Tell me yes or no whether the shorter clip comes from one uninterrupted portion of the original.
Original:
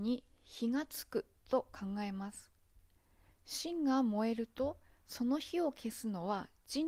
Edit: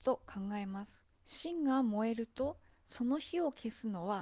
no